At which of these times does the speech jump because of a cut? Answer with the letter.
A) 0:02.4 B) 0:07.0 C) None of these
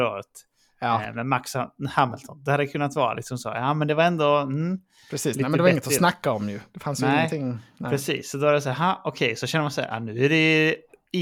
C